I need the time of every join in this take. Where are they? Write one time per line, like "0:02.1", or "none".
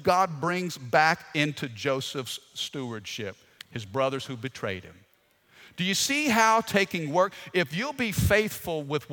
none